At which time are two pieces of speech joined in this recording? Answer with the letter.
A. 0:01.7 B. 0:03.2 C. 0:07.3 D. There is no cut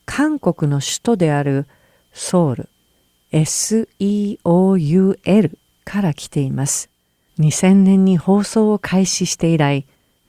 C